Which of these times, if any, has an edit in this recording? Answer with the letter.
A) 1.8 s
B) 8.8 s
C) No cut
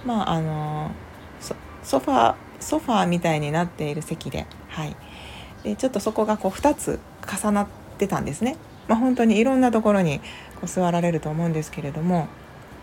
B